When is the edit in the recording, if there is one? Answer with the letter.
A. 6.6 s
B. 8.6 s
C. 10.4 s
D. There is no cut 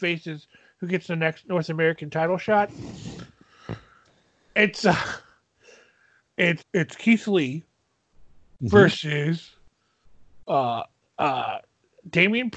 A